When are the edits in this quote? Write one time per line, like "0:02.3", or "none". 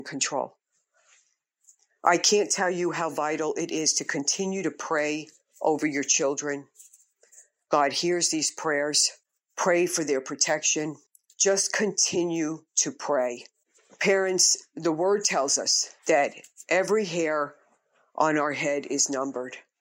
0:16.0